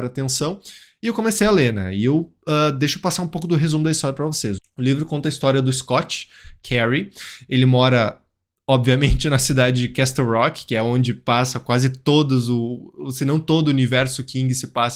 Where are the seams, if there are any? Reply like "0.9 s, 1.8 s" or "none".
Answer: 4.6 s